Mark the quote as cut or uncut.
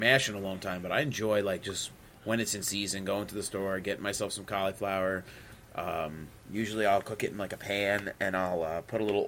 uncut